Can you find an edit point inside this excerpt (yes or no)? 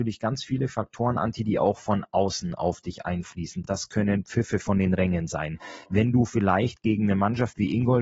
no